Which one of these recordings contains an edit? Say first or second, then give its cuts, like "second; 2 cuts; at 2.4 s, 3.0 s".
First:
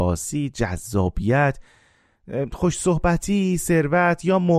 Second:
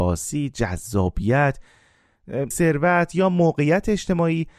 second; 1 cut; at 2.5 s